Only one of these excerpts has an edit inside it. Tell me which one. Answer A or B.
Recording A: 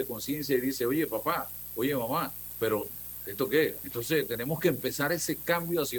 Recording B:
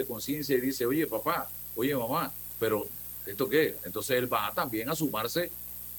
A